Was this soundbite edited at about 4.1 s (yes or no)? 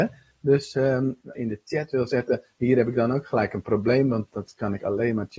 no